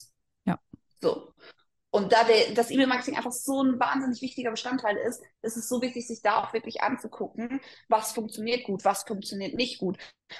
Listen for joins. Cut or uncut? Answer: uncut